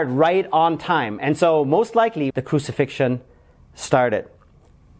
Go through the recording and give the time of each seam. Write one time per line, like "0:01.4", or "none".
0:02.3